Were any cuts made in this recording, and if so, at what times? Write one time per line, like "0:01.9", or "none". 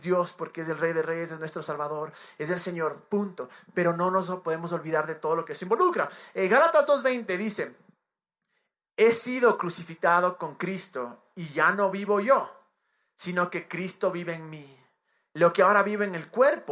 none